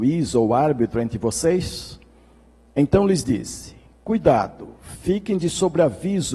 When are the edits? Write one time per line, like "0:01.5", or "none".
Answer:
none